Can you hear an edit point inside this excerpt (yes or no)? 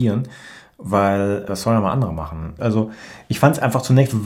yes